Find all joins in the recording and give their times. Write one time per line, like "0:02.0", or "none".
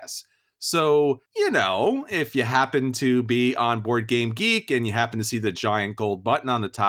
0:01.3